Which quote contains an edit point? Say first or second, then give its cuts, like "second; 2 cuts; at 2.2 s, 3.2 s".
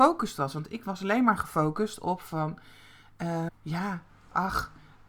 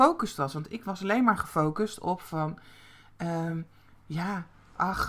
first; 1 cut; at 3.5 s